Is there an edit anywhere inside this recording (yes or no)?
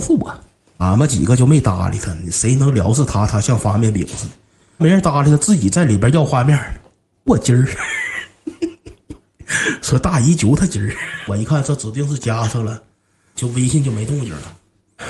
yes